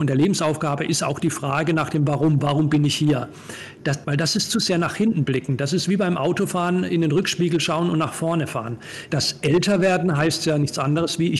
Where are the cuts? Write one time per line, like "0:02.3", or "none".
0:04.0
0:09.1